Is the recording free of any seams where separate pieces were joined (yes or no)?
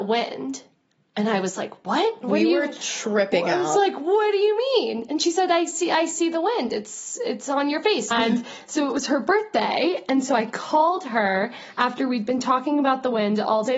no